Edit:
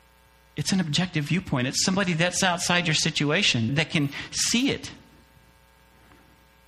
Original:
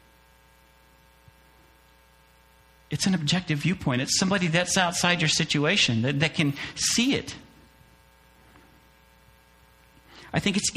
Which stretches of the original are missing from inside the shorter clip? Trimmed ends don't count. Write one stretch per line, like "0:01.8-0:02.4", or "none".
0:06.0-0:06.1